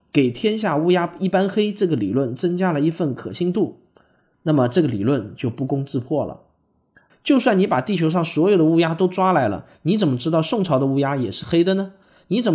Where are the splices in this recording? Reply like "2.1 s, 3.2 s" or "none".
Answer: 4.3 s, 7.1 s